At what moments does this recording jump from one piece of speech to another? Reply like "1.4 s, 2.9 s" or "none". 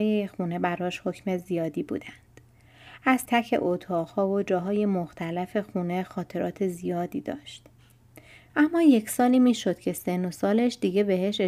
3.3 s, 8.5 s

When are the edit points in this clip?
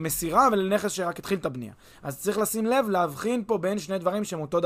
none

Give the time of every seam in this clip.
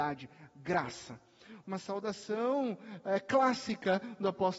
1.6 s

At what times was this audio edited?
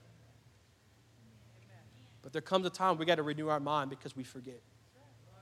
none

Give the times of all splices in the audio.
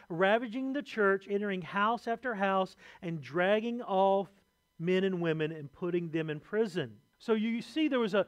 7.1 s

